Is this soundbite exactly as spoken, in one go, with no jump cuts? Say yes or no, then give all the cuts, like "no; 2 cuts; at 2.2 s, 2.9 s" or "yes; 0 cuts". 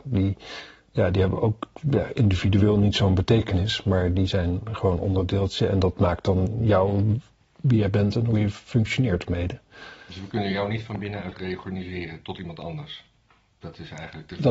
yes; 0 cuts